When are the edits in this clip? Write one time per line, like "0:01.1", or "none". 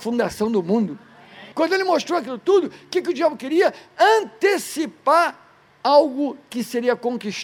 0:01.5